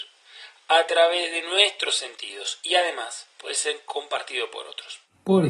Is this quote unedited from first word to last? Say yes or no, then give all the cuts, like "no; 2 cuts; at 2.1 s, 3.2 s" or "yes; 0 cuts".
yes; 0 cuts